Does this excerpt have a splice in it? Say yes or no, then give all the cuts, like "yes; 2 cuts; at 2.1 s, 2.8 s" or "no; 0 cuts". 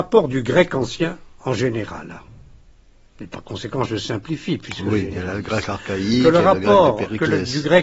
no; 0 cuts